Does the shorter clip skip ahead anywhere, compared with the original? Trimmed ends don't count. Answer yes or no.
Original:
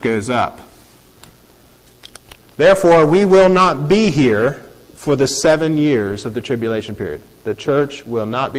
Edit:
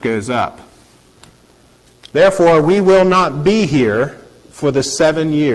yes